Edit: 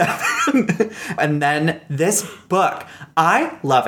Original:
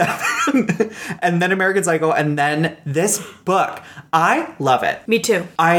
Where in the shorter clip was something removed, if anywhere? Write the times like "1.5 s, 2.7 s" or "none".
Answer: 1.2 s